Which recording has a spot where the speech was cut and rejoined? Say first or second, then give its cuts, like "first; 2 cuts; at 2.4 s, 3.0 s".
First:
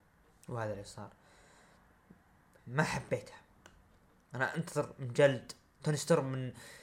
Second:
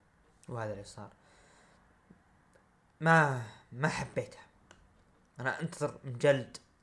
first; 1 cut; at 2.6 s